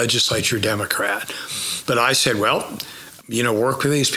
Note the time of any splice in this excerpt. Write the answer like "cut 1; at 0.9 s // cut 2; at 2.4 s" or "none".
cut 1; at 1.9 s // cut 2; at 3.2 s